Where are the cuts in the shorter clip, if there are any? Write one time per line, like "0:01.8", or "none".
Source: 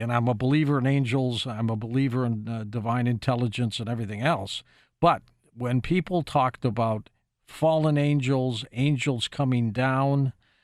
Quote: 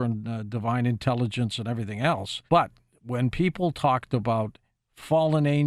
0:02.5